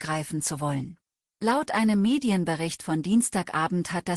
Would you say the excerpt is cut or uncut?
cut